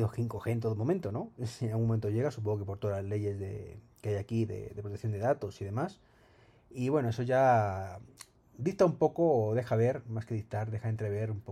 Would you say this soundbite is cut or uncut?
cut